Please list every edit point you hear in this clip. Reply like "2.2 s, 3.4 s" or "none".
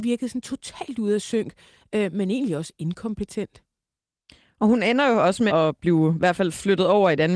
5.5 s